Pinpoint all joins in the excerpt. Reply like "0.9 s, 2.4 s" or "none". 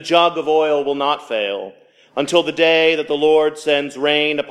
none